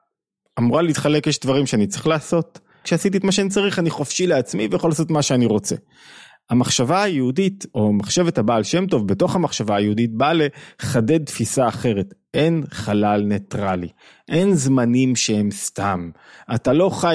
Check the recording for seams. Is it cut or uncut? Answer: cut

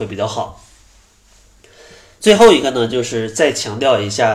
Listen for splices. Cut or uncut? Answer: uncut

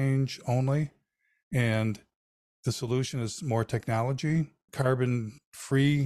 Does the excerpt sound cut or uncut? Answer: cut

